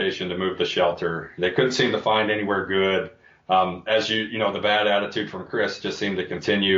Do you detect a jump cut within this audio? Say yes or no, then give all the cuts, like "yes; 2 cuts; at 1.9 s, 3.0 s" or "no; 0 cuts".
no; 0 cuts